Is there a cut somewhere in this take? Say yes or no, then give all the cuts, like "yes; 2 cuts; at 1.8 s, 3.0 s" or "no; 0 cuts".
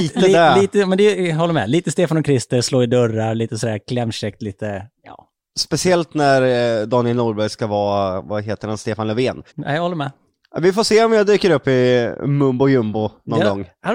yes; 1 cut; at 9.5 s